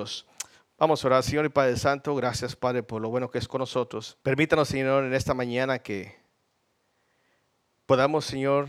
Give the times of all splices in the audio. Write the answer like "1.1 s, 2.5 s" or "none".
4.2 s